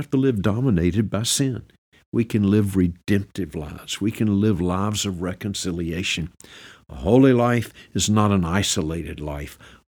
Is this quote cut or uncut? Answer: uncut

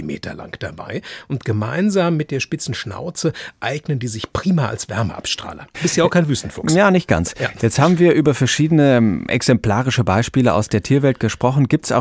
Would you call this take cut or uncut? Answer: cut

